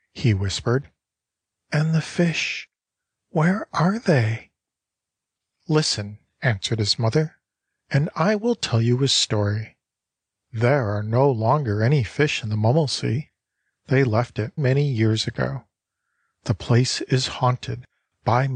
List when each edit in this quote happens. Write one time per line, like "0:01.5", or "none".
0:14.6